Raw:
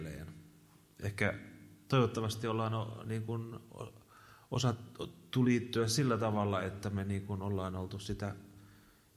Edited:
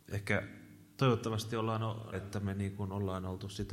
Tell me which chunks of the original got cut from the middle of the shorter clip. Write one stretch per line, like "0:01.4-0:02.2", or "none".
0:03.0-0:06.6

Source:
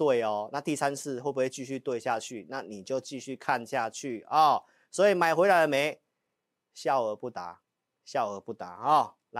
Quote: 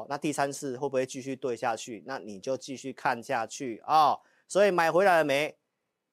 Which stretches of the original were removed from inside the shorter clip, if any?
none

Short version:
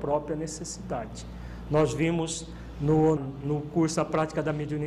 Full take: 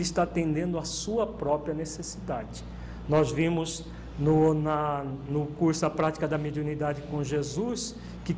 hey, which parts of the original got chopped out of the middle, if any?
0:04.5-0:05.0

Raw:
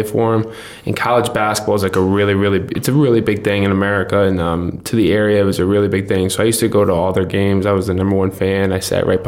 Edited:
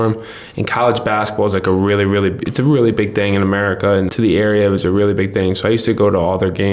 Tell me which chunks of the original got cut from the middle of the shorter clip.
0:04.4-0:04.8

